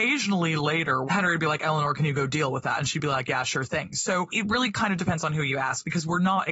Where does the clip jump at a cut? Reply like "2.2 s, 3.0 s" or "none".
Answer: 1.1 s